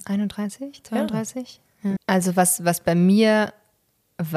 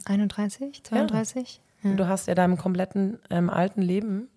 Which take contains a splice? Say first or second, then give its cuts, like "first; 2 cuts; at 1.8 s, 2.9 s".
first; 1 cut; at 2.0 s